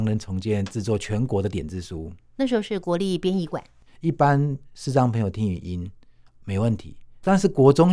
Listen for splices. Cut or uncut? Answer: cut